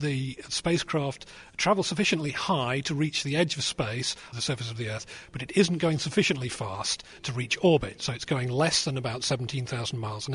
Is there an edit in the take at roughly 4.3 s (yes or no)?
yes